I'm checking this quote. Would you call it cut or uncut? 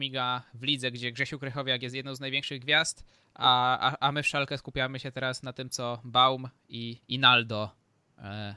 cut